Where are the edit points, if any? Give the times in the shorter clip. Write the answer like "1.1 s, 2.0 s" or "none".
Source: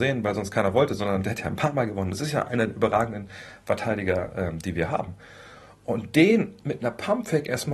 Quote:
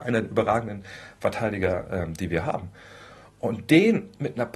none